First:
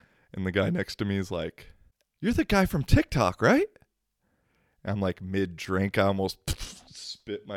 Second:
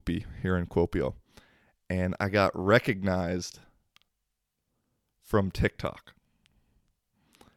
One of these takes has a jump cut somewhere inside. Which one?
first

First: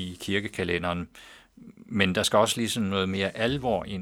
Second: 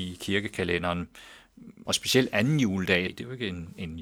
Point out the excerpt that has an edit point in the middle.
second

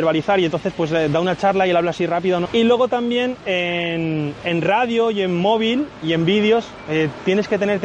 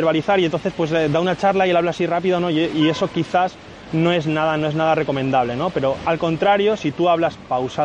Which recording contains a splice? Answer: first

